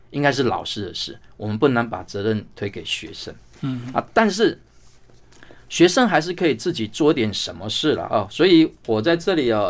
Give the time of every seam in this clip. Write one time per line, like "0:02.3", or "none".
none